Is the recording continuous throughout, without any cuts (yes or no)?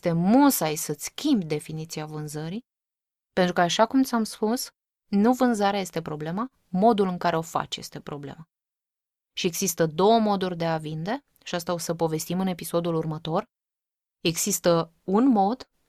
yes